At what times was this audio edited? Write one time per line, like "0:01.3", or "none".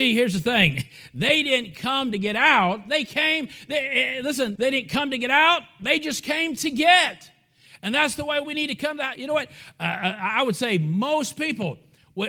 0:04.6